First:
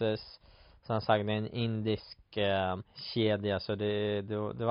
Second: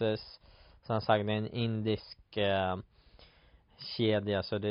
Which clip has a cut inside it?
first; 1 cut; at 2.8 s

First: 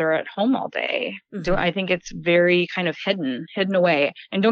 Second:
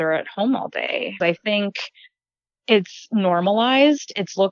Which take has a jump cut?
second; 1 cut; at 1.2 s

